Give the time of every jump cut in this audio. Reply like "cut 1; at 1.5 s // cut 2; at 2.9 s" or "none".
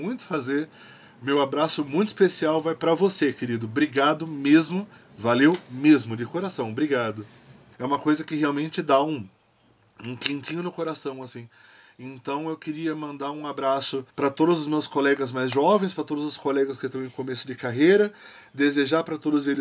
cut 1; at 5.0 s // cut 2; at 7.7 s // cut 3; at 14.1 s